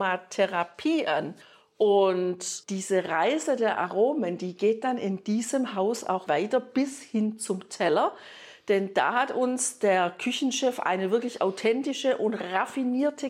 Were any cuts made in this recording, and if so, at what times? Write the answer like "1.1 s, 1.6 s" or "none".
6.3 s